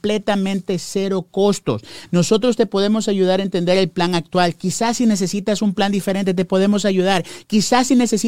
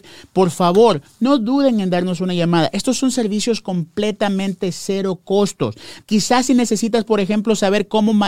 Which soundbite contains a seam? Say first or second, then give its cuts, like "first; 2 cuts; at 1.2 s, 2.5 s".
second; 1 cut; at 6.0 s